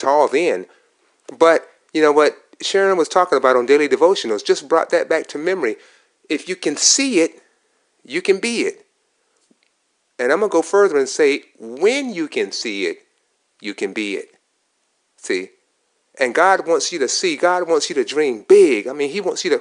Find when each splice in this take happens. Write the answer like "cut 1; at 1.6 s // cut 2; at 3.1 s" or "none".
none